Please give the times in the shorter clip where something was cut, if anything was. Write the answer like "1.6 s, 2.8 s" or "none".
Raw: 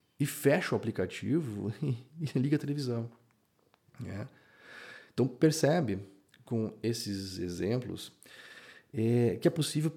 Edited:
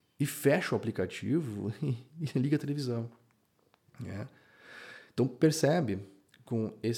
none